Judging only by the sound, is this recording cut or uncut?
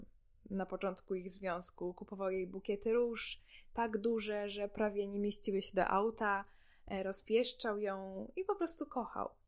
uncut